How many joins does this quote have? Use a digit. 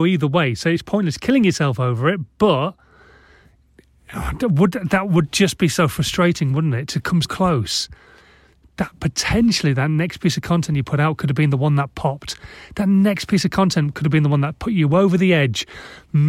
1